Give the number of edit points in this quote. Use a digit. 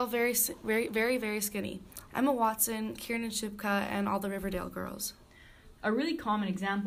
2